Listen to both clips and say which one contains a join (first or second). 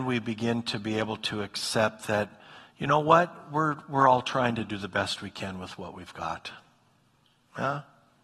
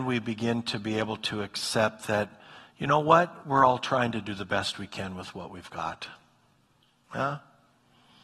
second